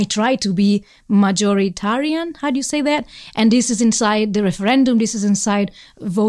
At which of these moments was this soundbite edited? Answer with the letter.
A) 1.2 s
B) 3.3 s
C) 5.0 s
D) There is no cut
D